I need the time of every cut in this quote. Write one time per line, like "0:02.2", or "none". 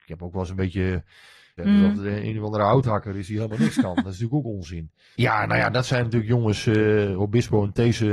0:01.6
0:05.1

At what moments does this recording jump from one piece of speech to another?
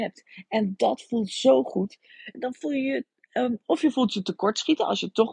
0:02.3

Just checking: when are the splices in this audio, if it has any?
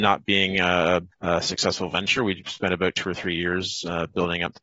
0:01.1

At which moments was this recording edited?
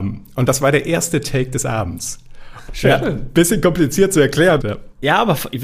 0:02.7
0:04.6

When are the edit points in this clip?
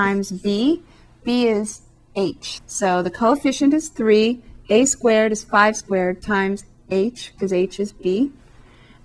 0:02.6

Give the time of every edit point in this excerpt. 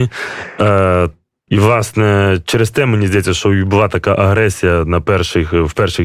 0:01.5

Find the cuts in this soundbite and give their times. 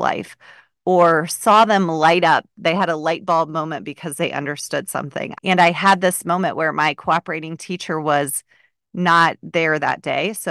0:05.3

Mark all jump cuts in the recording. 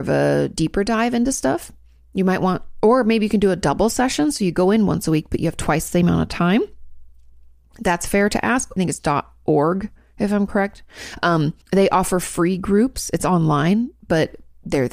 0:08.8
0:11.6

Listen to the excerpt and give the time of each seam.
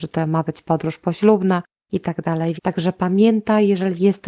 0:02.6

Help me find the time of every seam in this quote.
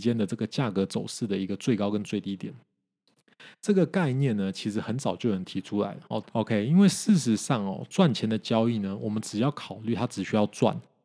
0:06.2

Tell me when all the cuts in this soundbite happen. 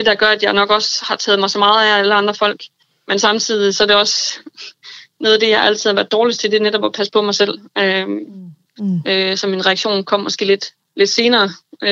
0:08.6

